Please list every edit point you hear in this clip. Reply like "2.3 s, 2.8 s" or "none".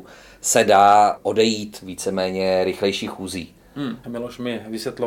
4.0 s

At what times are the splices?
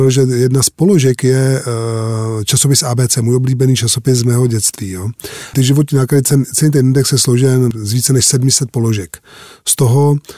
5.5 s, 7.7 s

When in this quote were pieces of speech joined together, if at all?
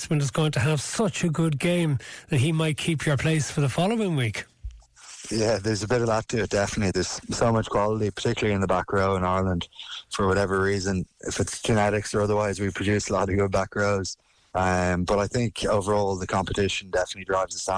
14.5 s

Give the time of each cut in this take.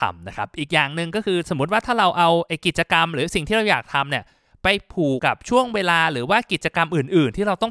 5.2 s

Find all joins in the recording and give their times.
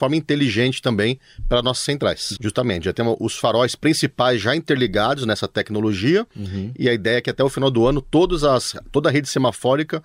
2.4 s

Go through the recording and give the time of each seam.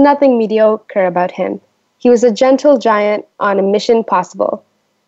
none

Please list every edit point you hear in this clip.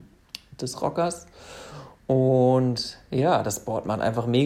none

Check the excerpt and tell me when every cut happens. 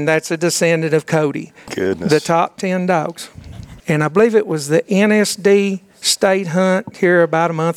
1.7 s, 3.8 s

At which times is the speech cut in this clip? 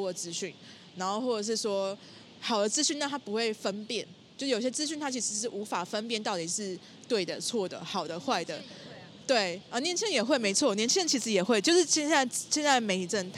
none

